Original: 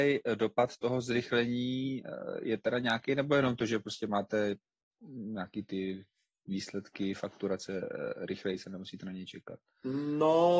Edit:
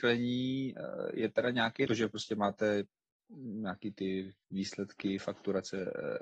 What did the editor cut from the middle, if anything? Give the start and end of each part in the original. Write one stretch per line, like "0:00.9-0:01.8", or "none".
0:03.1-0:03.6
0:06.1-0:06.4